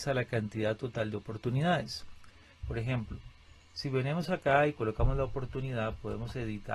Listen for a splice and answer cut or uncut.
cut